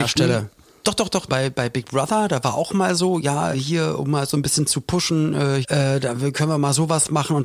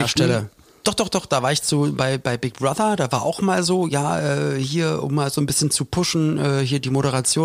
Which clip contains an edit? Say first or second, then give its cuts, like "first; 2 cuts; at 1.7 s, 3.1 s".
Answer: first; 3 cuts; at 1.3 s, 3.5 s, 5.6 s